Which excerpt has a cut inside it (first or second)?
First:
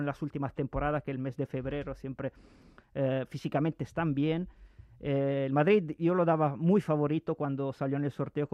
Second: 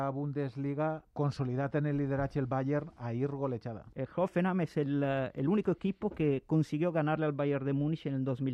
second